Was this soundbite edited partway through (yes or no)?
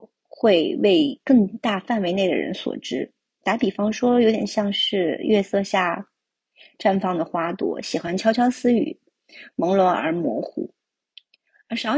no